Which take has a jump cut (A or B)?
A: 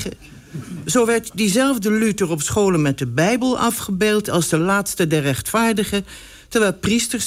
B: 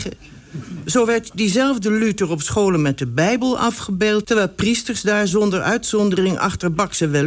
B